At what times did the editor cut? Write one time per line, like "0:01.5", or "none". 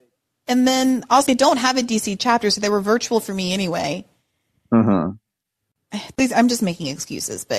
0:01.3